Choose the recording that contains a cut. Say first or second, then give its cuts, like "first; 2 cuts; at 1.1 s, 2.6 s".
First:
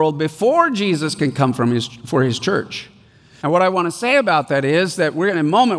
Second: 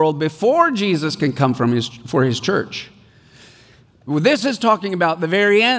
first; 1 cut; at 3.4 s